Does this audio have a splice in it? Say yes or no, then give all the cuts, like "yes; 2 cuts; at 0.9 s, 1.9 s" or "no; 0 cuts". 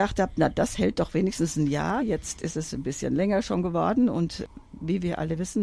no; 0 cuts